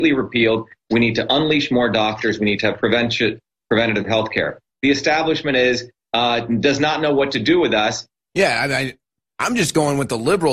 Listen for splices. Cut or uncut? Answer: cut